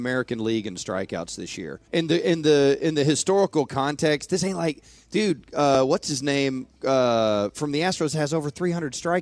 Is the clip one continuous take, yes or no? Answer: no